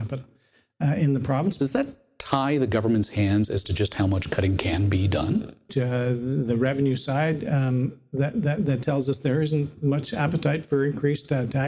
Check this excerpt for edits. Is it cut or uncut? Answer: cut